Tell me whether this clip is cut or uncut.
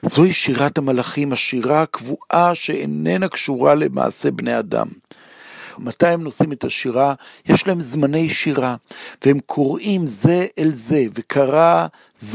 cut